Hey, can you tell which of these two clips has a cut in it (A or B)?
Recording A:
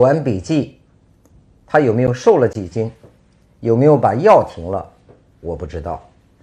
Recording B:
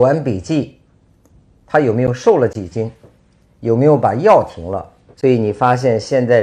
B